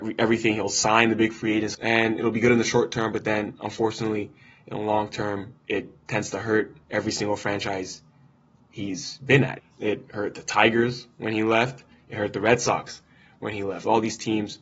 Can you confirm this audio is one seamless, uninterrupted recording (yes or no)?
no